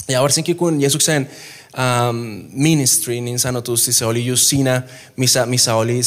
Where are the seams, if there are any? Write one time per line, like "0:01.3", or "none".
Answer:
none